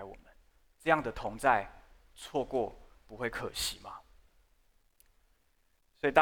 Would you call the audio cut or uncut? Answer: uncut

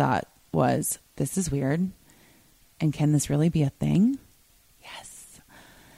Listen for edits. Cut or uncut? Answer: cut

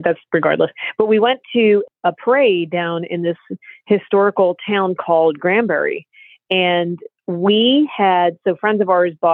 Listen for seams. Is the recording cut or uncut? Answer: uncut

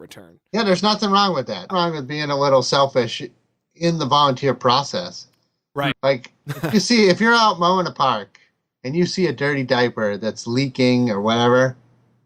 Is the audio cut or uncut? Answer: cut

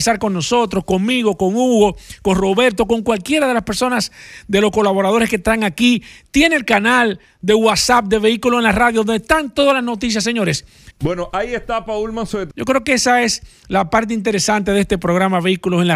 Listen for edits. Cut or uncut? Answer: cut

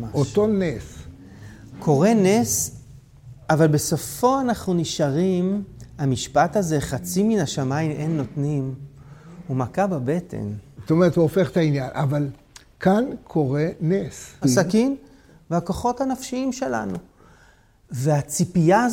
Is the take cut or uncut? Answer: cut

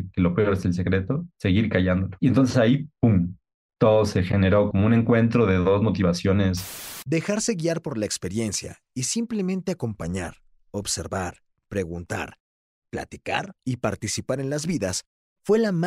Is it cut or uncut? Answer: cut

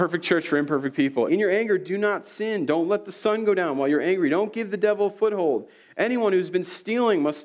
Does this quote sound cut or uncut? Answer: cut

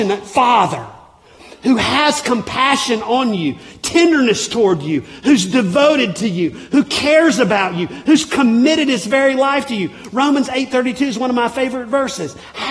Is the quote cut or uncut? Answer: uncut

